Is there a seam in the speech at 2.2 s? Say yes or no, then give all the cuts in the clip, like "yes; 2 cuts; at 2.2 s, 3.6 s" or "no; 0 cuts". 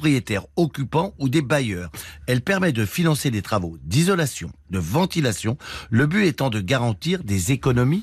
no; 1 cut; at 4.6 s